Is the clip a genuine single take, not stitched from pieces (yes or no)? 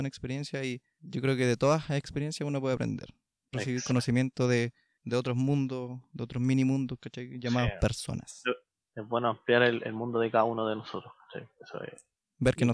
no